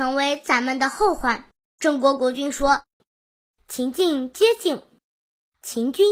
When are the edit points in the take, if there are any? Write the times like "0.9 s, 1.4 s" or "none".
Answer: 1.6 s, 3.0 s